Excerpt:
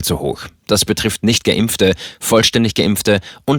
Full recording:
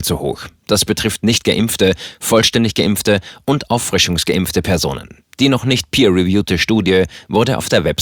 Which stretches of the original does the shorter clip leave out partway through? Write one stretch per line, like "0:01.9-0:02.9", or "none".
none